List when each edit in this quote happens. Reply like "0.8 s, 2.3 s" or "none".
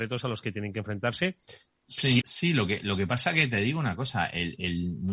2.2 s